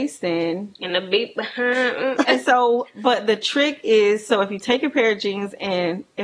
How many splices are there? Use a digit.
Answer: 1